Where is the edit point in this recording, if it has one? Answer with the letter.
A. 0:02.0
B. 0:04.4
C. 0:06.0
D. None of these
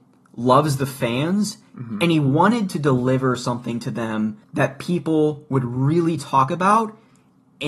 B